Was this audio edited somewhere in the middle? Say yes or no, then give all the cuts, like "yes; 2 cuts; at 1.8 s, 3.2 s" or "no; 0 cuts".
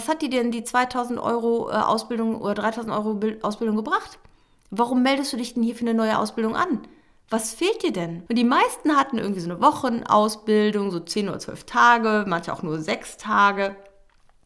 yes; 1 cut; at 8.3 s